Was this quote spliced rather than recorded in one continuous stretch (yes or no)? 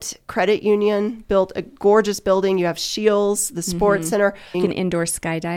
yes